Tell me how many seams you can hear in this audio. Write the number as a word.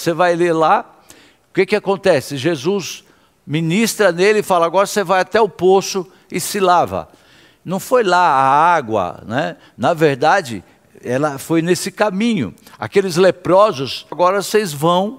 one